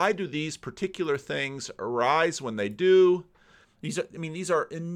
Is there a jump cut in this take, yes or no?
yes